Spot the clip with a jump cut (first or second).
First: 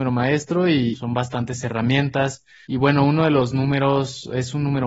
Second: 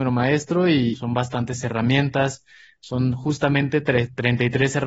first